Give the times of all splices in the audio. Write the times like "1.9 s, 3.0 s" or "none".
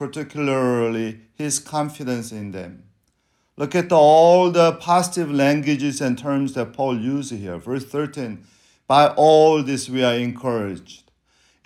none